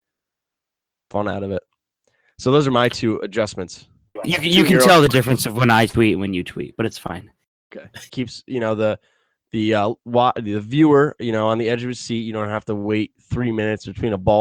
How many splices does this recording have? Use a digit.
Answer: 2